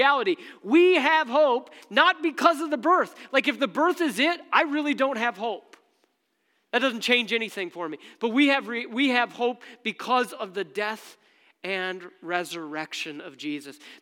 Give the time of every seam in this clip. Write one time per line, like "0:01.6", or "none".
none